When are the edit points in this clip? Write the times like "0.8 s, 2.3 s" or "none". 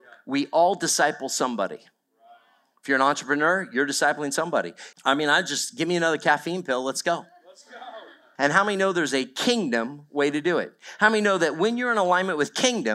4.9 s, 8.4 s